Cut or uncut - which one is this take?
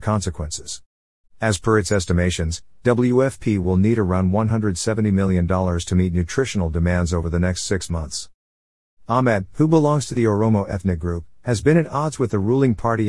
cut